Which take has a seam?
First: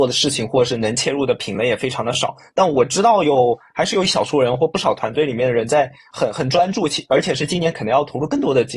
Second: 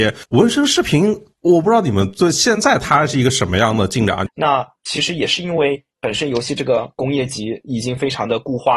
second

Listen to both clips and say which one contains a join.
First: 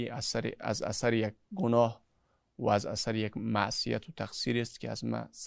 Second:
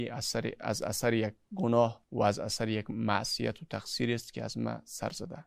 second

